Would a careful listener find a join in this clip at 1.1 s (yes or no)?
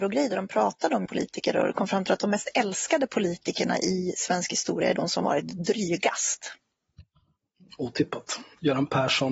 yes